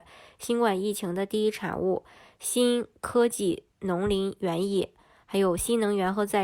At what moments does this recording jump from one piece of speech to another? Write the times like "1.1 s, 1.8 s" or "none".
none